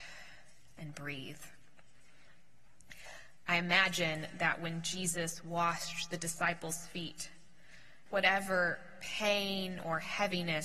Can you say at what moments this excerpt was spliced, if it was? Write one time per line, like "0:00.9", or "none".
0:08.1